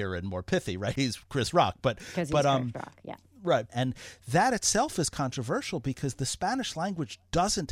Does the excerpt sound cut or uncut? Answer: cut